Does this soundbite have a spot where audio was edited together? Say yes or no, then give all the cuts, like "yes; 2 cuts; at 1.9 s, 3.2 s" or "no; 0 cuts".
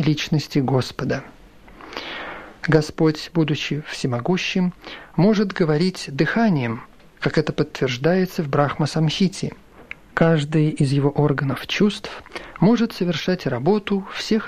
no; 0 cuts